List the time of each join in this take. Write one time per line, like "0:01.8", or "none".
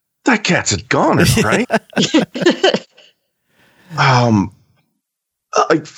0:01.6